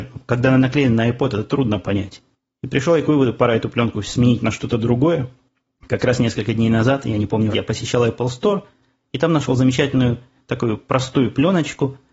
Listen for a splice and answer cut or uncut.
cut